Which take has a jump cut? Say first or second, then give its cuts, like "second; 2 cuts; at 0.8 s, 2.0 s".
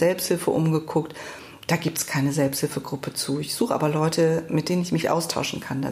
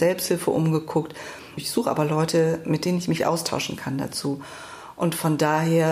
second; 1 cut; at 1.6 s